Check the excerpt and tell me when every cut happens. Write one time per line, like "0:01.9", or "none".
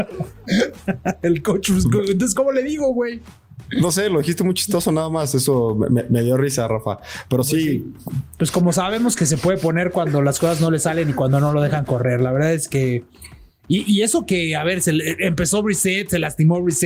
0:02.3
0:08.4